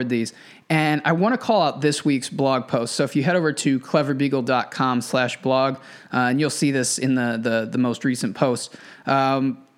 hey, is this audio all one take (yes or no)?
yes